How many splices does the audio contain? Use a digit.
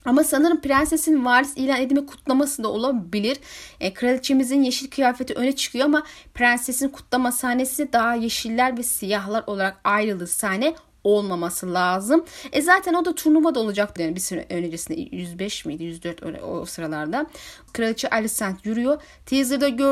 2